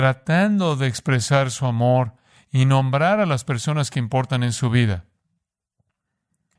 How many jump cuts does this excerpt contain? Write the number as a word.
zero